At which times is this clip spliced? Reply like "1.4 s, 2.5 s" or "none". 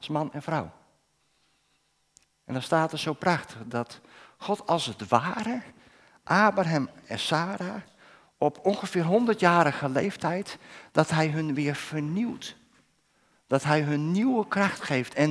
2.2 s